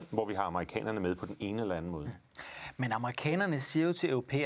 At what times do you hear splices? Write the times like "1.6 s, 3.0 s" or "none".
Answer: none